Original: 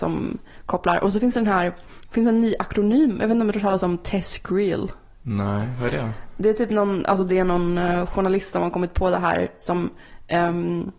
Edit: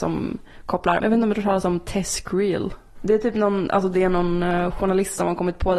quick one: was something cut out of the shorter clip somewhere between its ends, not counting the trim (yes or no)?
yes